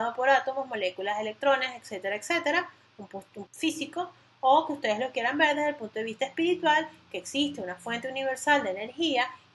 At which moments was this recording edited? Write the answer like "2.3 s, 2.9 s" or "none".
3.5 s